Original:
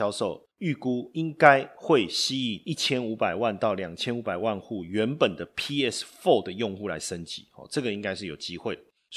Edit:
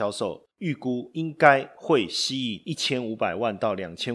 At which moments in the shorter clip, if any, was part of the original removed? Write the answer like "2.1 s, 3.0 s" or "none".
none